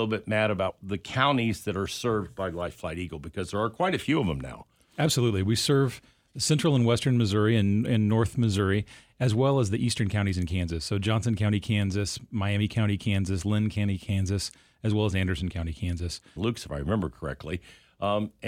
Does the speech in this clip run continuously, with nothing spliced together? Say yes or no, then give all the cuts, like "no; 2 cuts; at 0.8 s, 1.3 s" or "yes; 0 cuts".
no; 1 cut; at 16.4 s